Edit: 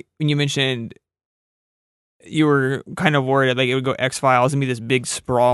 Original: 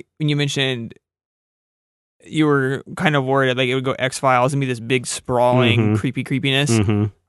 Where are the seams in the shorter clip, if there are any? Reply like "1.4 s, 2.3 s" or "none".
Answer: none